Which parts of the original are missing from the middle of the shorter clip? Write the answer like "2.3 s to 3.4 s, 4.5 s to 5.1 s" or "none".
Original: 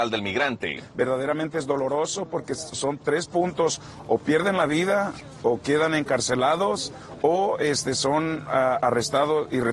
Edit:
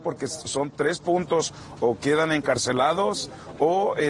4.0 s to 5.4 s